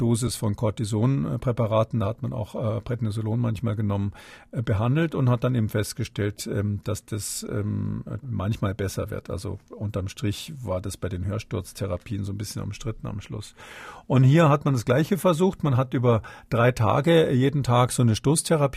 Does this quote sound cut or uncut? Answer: cut